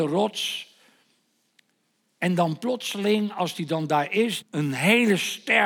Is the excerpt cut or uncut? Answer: cut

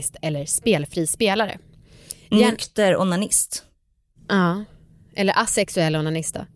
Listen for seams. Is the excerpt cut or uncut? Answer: uncut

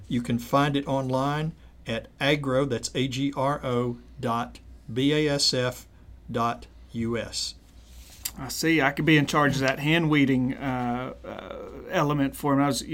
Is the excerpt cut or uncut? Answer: uncut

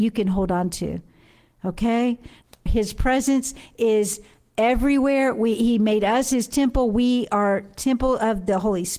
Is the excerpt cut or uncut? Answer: cut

